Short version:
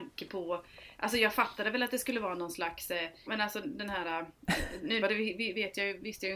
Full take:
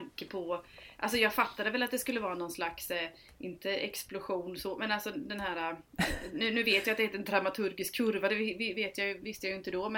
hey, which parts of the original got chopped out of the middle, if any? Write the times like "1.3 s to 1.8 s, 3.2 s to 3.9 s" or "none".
3.3 s to 4.8 s, 6.5 s to 8.2 s